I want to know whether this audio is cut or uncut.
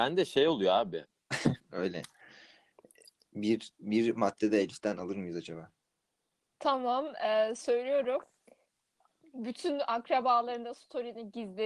cut